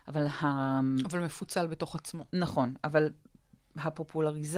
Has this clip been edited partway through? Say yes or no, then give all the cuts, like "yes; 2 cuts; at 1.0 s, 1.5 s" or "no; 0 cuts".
no; 0 cuts